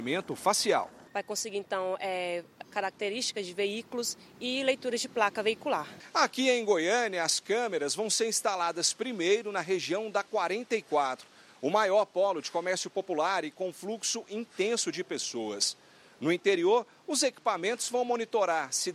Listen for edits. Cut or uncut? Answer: cut